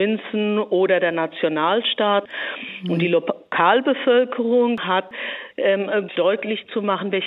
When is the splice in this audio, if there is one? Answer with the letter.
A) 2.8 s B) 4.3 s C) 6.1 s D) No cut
C